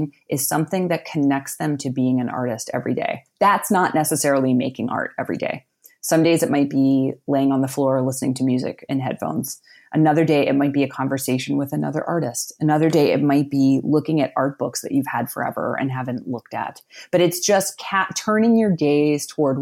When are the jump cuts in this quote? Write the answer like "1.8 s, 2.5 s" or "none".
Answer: none